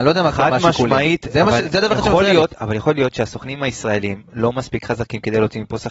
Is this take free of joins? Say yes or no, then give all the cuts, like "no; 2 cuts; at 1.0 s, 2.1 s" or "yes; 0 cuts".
yes; 0 cuts